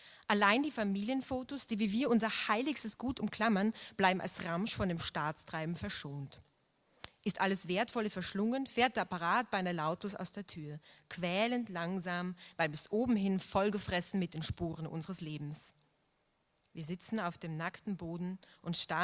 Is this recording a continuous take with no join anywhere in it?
yes; 0 cuts

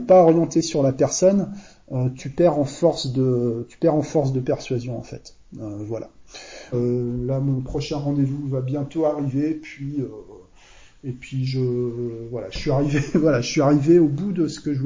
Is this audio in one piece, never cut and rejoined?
no; 2 cuts; at 2.2 s, 6.7 s

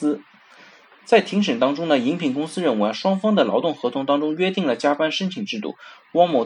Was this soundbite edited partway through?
no; 0 cuts

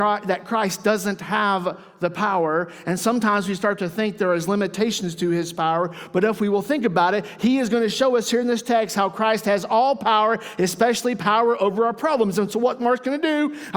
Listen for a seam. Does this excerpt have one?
no; 0 cuts

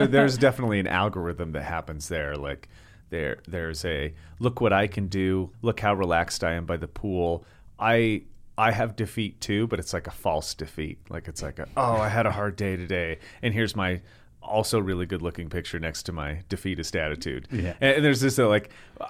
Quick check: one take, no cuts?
no; 1 cut; at 5.5 s

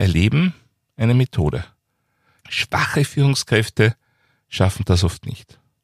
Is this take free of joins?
no; 1 cut; at 2.4 s

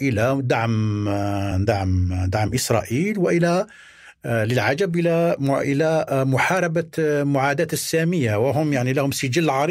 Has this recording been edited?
no; 0 cuts

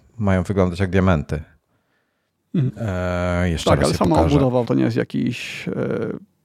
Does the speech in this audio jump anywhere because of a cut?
yes; 2 cuts; at 2.7 s, 4.6 s

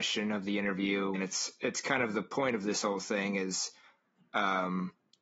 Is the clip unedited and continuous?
no; 1 cut; at 1.2 s

